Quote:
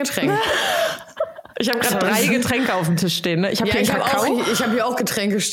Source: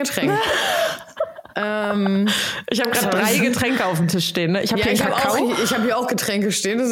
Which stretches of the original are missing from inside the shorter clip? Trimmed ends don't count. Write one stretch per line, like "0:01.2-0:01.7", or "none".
0:01.5-0:02.6